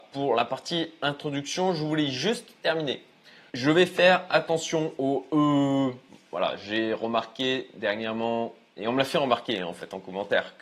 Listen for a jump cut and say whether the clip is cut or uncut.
cut